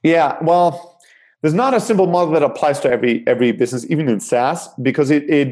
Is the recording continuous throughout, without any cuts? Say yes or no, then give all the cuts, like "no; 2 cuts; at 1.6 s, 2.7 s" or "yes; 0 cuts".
yes; 0 cuts